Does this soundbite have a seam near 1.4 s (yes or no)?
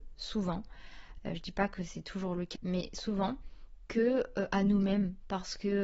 no